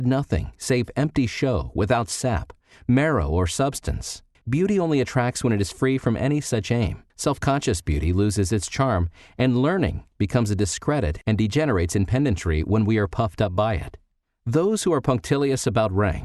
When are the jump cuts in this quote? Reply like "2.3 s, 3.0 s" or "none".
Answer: 4.3 s, 7.1 s